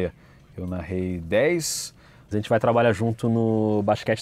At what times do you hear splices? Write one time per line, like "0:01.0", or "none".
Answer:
0:02.3